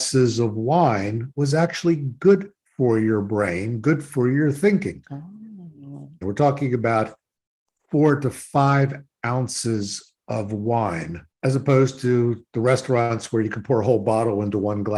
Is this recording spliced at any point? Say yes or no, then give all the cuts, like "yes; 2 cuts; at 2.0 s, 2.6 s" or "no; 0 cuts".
yes; 2 cuts; at 6.2 s, 11.3 s